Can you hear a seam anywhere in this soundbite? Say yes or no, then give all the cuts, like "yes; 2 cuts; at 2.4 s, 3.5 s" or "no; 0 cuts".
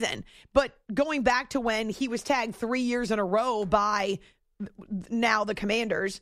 no; 0 cuts